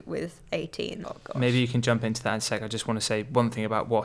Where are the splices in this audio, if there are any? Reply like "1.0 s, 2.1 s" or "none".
1.0 s

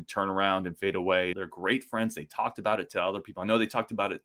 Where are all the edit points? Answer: 1.3 s

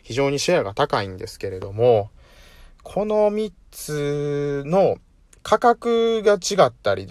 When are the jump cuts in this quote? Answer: none

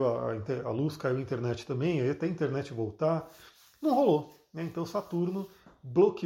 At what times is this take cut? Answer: none

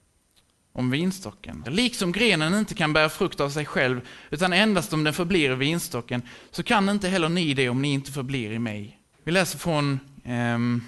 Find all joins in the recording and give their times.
1.7 s, 9.1 s

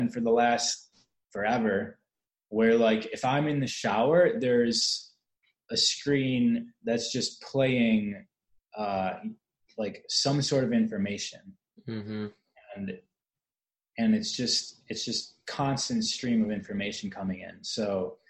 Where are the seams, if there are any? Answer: none

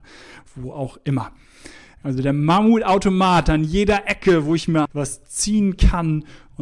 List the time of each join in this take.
2.0 s, 4.8 s

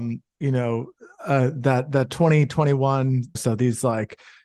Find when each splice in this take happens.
3.4 s

